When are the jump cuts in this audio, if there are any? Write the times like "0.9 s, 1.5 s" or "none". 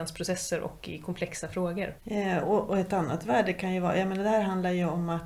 2.0 s